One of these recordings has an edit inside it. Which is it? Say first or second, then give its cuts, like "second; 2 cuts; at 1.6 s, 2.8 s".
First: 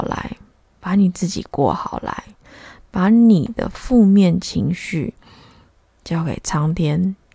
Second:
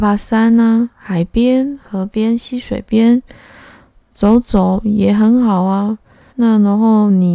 second; 1 cut; at 6.3 s